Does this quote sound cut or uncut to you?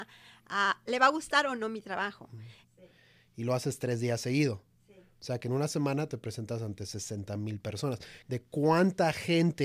cut